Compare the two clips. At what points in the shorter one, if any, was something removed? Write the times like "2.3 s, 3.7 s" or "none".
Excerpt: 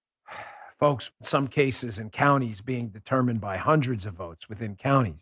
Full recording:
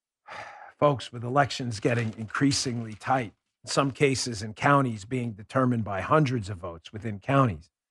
1.1 s

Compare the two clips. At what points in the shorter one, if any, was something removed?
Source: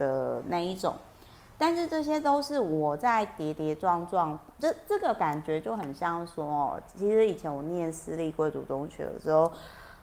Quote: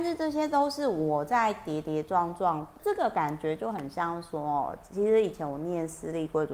2.8 s

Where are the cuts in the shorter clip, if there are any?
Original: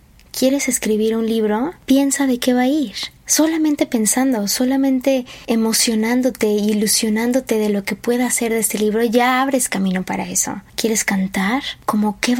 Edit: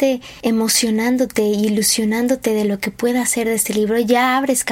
none

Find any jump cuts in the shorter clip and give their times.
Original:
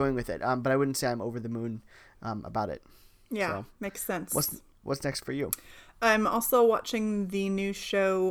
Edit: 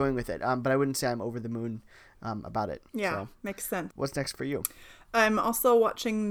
2.9 s, 3.9 s

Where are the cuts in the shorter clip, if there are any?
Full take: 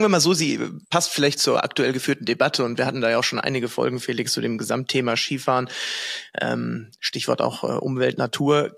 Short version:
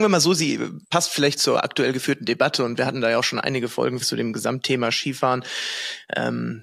4.0 s

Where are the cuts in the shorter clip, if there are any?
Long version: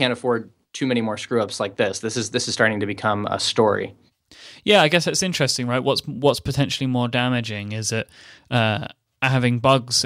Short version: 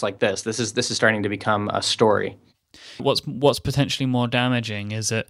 3.0 s

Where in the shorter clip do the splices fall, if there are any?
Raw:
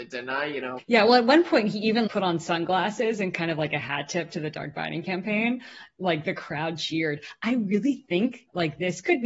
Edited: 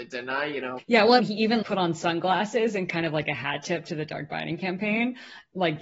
1.2 s

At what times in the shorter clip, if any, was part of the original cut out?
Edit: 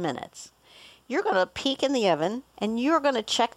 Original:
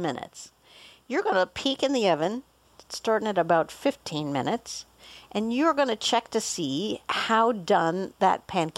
2.5 s

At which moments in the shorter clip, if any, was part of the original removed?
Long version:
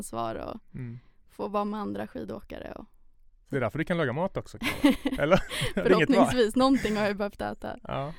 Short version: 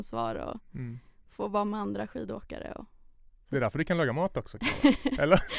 none

